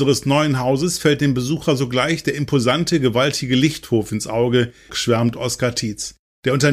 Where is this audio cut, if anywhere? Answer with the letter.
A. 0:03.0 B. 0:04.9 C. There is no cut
B